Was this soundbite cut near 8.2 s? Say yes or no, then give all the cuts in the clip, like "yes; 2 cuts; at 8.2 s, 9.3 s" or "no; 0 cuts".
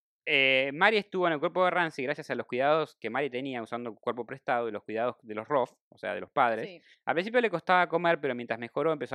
no; 1 cut; at 6.9 s